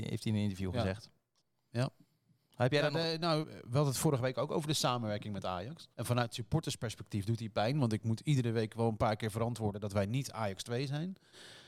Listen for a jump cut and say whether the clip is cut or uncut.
cut